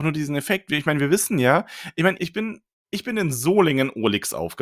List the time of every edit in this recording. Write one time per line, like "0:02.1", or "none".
0:02.2